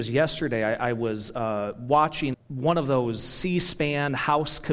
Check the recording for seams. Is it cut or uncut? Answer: cut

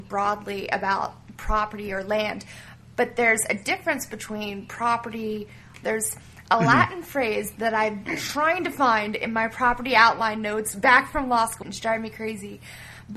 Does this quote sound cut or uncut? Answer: cut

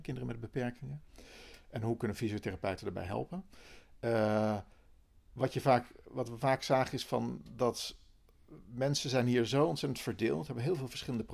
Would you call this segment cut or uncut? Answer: uncut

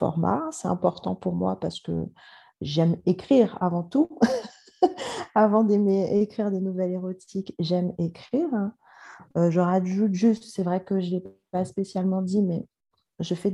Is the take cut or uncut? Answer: uncut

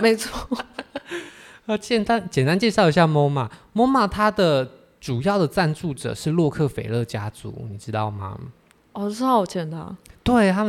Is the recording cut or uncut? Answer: uncut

